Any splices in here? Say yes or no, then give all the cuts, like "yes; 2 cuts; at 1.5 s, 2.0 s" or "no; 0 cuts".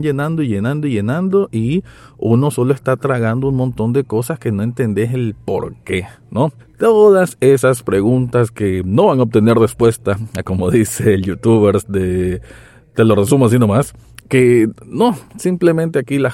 yes; 1 cut; at 6.6 s